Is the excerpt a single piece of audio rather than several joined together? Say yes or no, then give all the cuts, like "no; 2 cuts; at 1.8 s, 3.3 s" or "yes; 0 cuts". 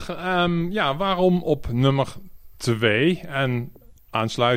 yes; 0 cuts